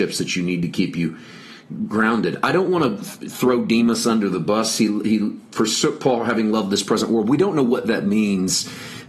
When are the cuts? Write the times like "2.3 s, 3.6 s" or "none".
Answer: none